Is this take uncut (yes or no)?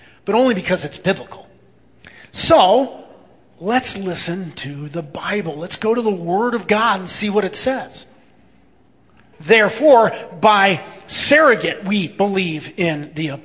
no